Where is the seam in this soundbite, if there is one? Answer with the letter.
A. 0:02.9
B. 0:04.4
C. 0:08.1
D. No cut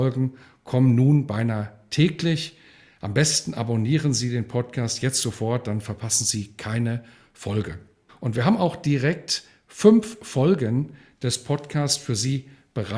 C